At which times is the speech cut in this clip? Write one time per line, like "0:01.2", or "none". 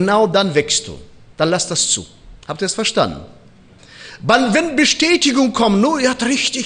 0:02.4